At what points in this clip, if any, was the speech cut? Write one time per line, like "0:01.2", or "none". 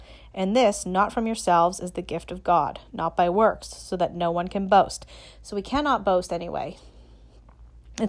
0:06.8

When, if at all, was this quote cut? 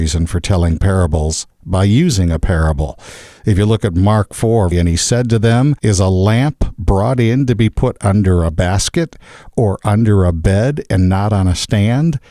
0:04.7

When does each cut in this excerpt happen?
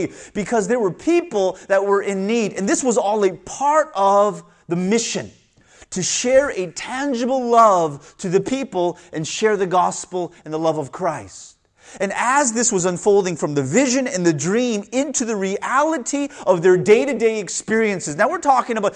none

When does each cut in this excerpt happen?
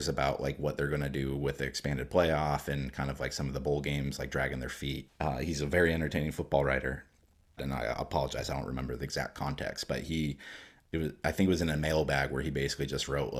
0:05.1
0:07.6

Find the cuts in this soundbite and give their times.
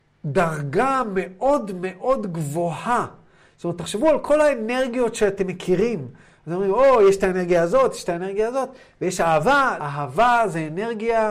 0:07.9
0:09.8

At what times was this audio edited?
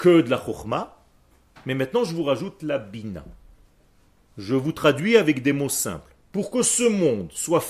none

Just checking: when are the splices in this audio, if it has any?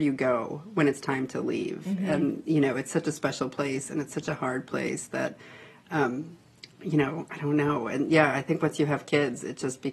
none

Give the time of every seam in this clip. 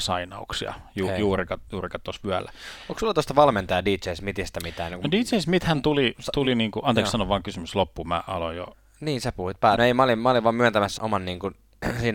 0:09.7
0:11.0

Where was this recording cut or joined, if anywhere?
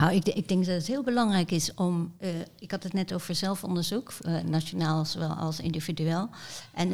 none

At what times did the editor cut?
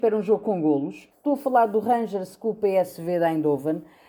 0:01.1

